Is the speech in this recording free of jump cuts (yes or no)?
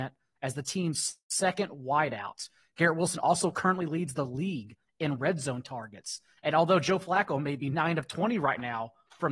yes